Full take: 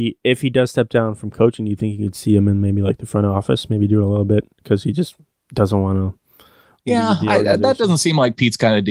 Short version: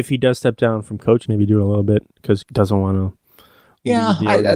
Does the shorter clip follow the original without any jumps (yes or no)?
no